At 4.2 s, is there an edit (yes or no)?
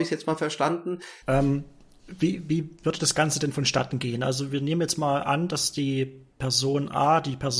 no